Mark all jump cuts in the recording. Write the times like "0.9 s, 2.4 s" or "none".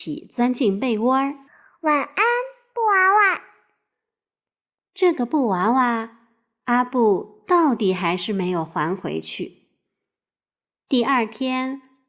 none